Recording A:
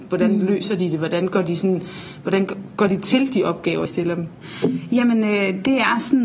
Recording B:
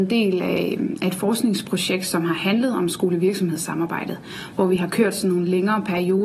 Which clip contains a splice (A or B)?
A